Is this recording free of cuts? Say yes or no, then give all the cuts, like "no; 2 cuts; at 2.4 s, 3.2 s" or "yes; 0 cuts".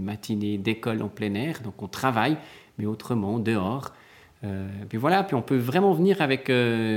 yes; 0 cuts